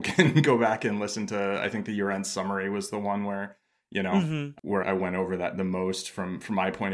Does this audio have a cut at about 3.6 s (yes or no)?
no